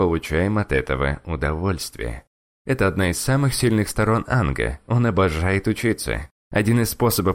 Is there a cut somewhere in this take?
no; 0 cuts

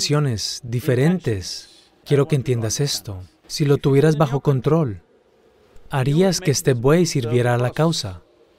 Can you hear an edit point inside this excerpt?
yes; 2 cuts; at 2.0 s, 3.4 s

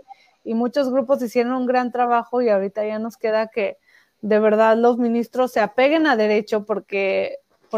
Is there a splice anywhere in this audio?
no; 0 cuts

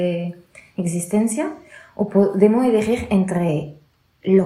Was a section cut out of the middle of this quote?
no; 0 cuts

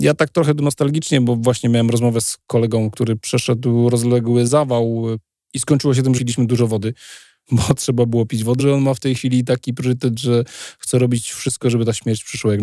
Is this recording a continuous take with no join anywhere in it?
no; 3 cuts; at 6.2 s, 8.6 s, 11.6 s

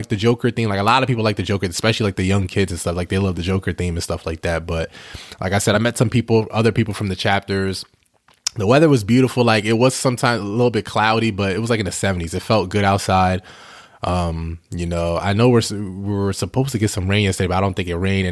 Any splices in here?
no; 0 cuts

